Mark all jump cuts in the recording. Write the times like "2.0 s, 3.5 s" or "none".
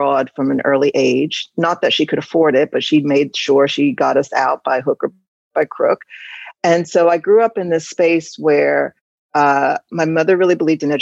6.6 s